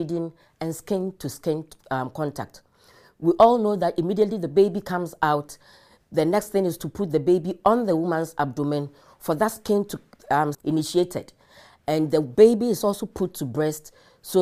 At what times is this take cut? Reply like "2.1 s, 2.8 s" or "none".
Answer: 10.5 s